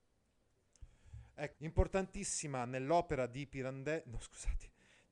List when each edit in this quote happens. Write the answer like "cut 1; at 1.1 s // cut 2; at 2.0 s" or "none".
cut 1; at 1.5 s

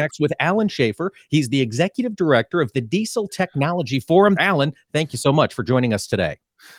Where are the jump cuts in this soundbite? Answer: cut 1; at 4.4 s

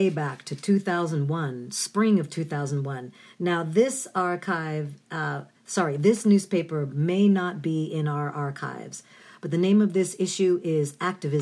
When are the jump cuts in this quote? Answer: none

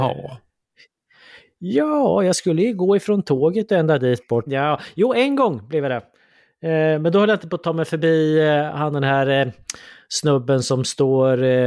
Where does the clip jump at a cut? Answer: cut 1; at 4.5 s

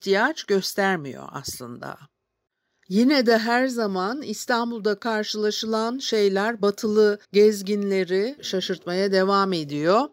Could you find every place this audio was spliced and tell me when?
cut 1; at 7.2 s // cut 2; at 8.4 s

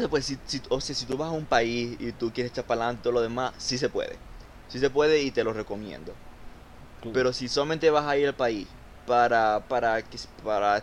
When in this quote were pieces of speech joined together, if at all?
cut 1; at 9.7 s

